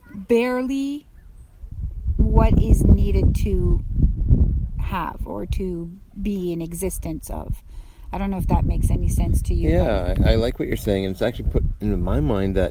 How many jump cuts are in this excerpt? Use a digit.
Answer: 0